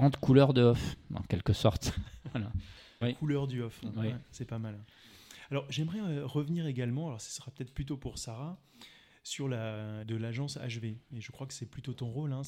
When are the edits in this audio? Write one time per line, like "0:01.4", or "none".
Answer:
0:03.0
0:10.0

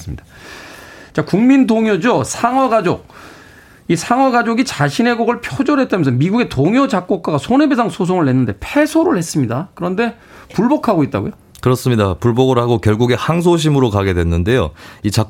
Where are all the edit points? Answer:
none

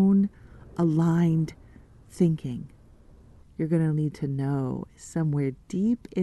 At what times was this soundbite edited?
0:03.4

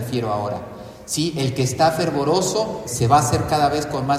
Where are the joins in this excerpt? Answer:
0:02.8

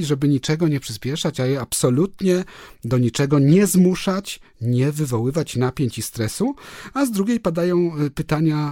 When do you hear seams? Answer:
none

